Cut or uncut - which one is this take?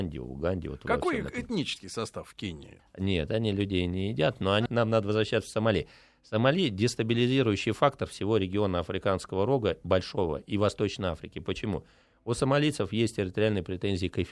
cut